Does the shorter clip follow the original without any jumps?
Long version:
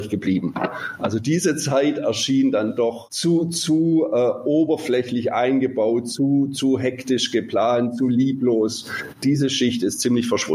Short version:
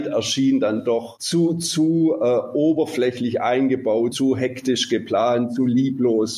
no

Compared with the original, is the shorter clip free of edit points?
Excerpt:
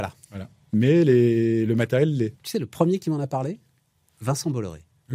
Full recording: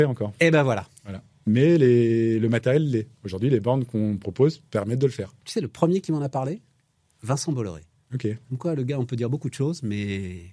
no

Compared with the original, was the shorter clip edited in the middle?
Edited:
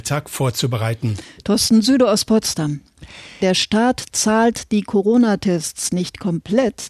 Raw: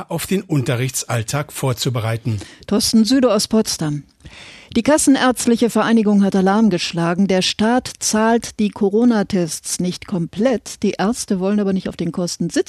yes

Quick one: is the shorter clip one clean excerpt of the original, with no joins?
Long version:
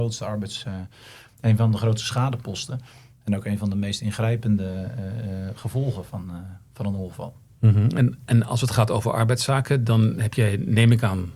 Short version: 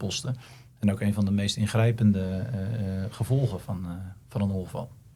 yes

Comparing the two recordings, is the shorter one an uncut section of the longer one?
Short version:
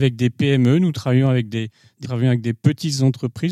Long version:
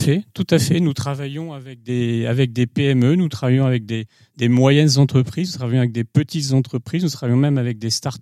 no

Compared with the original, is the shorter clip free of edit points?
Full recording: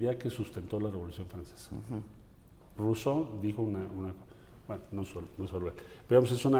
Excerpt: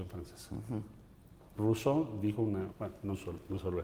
no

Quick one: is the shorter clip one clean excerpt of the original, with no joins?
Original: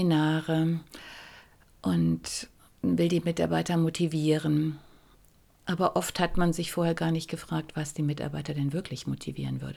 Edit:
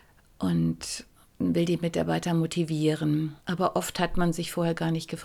no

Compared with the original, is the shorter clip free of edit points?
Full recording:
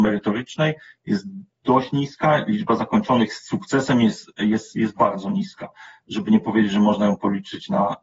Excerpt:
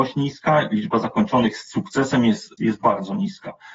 no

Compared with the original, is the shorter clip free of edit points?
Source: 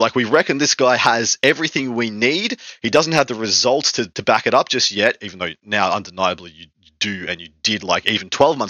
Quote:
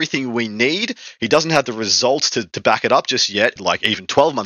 no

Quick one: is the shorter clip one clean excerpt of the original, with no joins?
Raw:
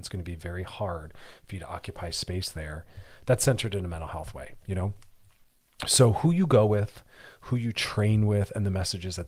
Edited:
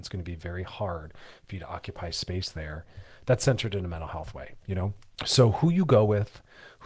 no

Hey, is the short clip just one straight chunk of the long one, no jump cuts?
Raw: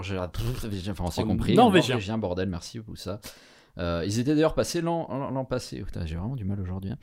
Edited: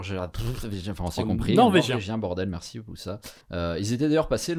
no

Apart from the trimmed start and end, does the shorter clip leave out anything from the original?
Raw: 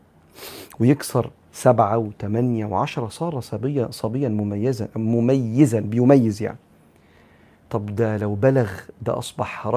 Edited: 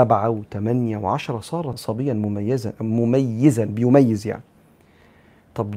yes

